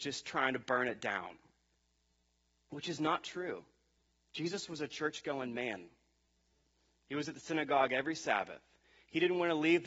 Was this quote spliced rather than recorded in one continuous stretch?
no; 0 cuts

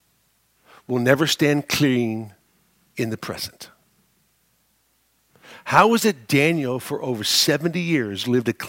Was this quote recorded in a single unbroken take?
yes; 0 cuts

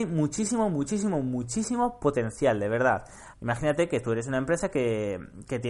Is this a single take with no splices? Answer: no; 1 cut; at 3.3 s

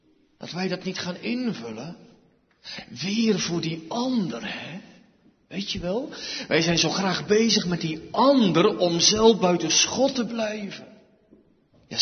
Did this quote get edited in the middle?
no; 0 cuts

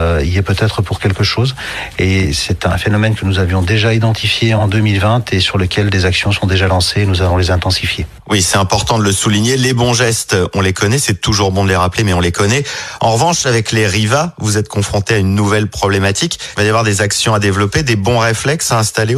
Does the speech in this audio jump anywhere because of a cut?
no; 0 cuts

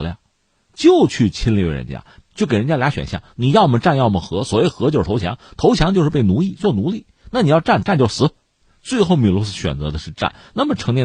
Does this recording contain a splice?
no; 0 cuts

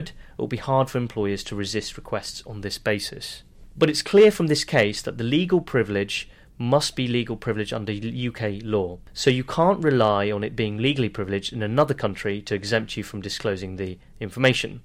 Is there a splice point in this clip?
yes; 1 cut; at 3.7 s

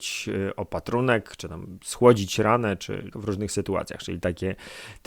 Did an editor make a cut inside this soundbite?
yes; 1 cut; at 3.1 s

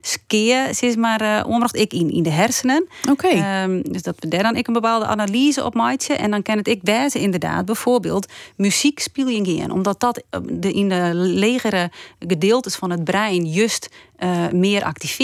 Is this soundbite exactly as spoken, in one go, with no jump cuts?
yes; 0 cuts

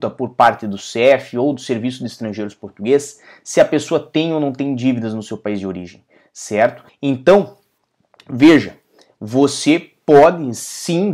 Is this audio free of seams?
no; 1 cut; at 6.9 s

